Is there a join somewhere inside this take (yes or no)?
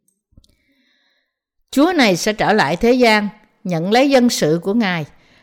no